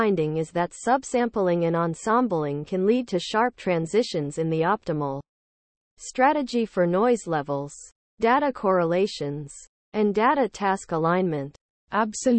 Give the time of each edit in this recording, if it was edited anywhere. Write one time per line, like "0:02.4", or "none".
none